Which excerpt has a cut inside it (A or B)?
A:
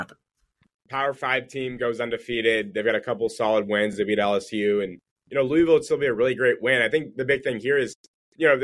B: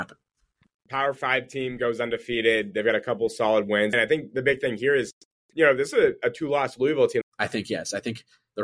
B